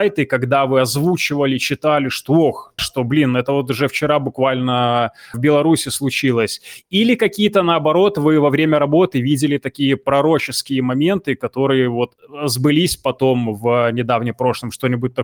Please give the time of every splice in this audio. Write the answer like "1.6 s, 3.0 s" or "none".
2.8 s